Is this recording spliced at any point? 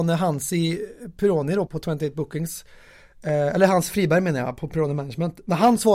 yes; 1 cut; at 1.7 s

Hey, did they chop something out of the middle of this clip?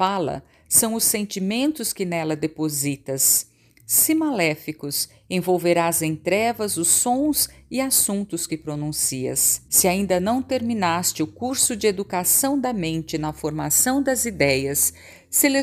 yes; 2 cuts; at 3.7 s, 9.7 s

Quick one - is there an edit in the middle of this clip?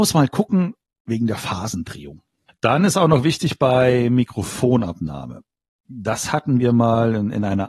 yes; 1 cut; at 2.5 s

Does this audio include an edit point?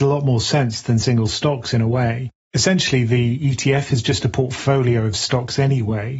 no; 0 cuts

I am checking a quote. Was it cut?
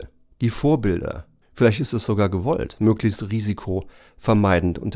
yes; 1 cut; at 1.4 s

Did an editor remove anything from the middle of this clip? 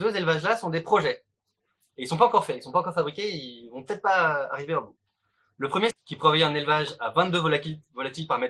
yes; 1 cut; at 5.9 s

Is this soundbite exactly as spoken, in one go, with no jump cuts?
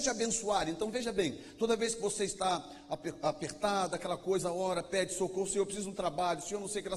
yes; 0 cuts

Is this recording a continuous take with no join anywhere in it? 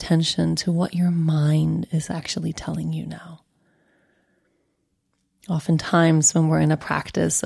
yes; 0 cuts

